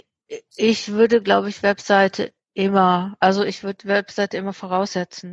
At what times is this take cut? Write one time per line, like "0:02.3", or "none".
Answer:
none